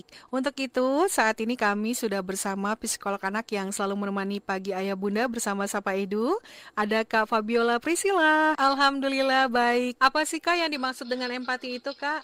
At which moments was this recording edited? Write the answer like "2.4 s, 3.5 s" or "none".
8.5 s, 10.0 s